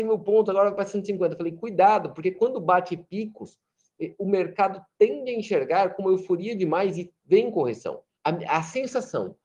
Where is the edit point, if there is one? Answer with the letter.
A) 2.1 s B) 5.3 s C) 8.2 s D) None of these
C